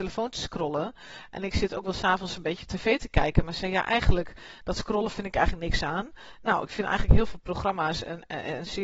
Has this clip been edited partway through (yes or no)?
no